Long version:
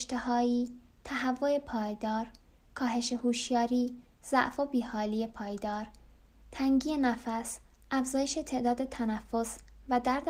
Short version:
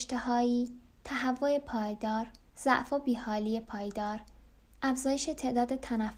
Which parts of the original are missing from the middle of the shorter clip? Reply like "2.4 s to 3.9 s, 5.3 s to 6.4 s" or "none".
2.5 s to 4.2 s, 6.3 s to 7.8 s